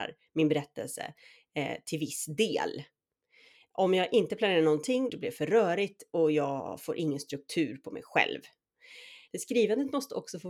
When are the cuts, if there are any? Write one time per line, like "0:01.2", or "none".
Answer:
0:05.1
0:09.3